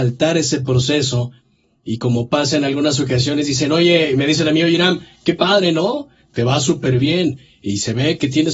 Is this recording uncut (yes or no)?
yes